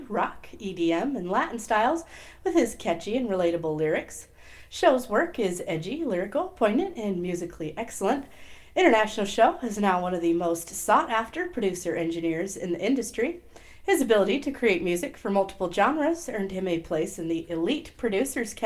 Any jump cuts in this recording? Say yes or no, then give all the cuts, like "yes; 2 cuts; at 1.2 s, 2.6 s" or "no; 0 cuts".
no; 0 cuts